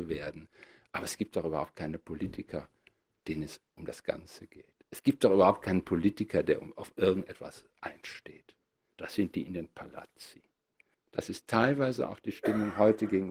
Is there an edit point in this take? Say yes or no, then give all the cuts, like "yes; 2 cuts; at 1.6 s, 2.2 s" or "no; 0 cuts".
yes; 1 cut; at 10.9 s